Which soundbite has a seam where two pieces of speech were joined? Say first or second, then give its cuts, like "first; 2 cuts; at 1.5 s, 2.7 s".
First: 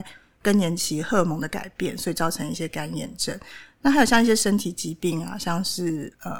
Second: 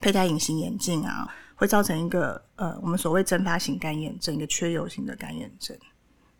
second; 1 cut; at 1.3 s